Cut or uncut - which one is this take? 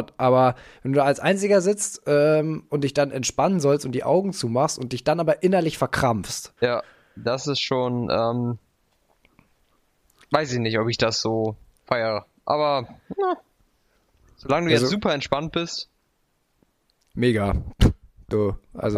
cut